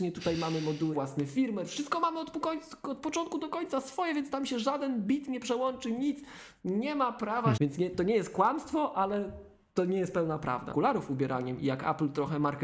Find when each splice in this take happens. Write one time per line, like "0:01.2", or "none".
0:00.9
0:07.6
0:10.7